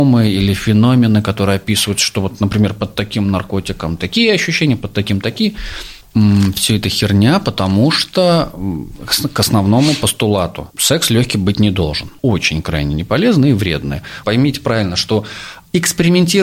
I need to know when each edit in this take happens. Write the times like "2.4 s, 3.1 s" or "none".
12.2 s, 14.2 s